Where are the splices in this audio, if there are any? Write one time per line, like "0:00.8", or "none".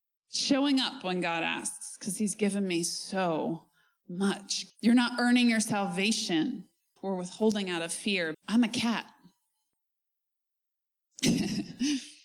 0:04.7
0:07.0
0:08.3